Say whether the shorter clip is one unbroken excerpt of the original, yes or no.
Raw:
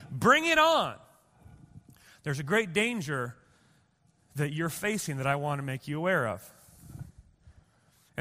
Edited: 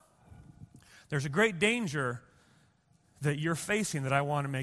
yes